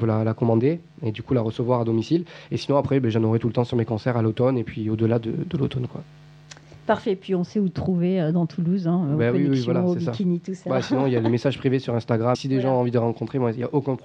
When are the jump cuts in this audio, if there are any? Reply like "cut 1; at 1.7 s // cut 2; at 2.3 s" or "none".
cut 1; at 12.3 s